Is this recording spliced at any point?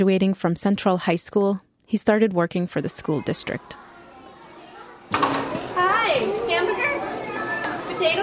yes; 1 cut; at 5.1 s

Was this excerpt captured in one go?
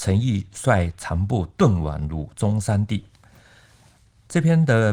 yes; 0 cuts

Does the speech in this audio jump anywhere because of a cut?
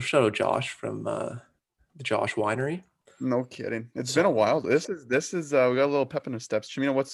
no; 0 cuts

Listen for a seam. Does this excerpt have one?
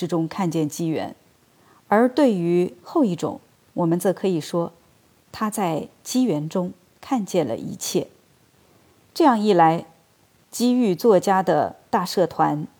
no; 0 cuts

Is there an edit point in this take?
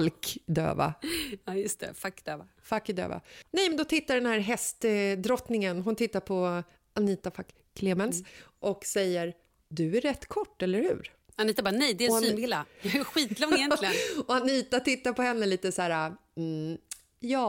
no; 0 cuts

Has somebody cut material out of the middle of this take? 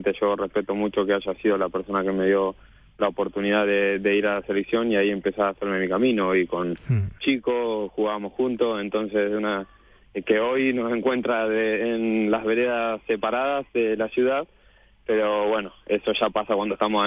yes; 1 cut; at 7.2 s

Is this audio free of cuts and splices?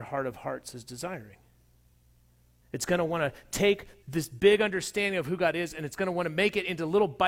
no; 2 cuts; at 2.6 s, 4.0 s

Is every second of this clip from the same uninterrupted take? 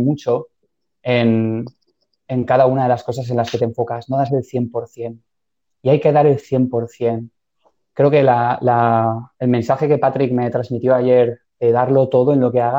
yes; 0 cuts

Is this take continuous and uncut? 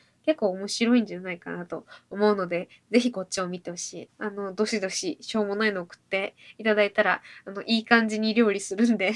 no; 1 cut; at 4.1 s

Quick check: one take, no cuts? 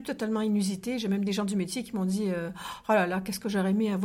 yes; 0 cuts

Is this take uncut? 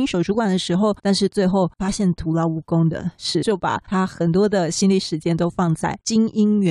no; 2 cuts; at 1.0 s, 3.4 s

